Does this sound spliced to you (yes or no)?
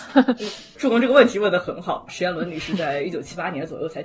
yes